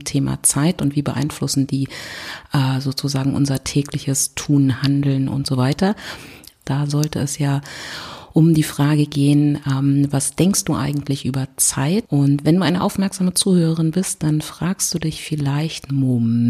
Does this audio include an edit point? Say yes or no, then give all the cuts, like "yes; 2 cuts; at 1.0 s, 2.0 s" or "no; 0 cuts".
yes; 2 cuts; at 6.6 s, 12.0 s